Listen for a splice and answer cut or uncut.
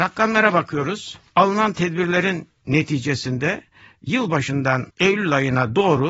uncut